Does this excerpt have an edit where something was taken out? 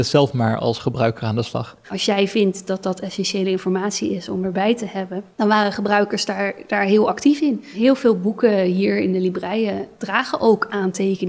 yes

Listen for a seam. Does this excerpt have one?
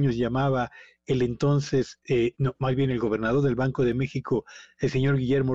yes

